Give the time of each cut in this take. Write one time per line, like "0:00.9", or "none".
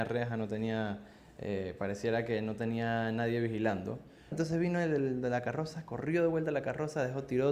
0:04.3